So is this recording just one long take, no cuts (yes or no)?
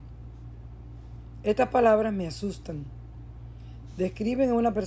yes